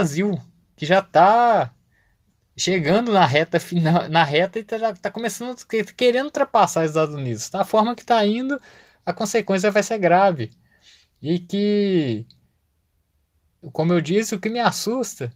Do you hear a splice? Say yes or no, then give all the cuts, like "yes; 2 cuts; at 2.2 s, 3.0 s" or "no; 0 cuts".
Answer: no; 0 cuts